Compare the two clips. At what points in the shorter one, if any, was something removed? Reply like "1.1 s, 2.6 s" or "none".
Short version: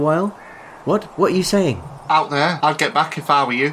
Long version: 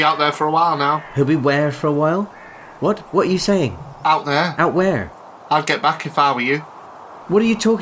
2.6 s